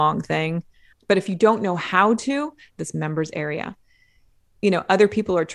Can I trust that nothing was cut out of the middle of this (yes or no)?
no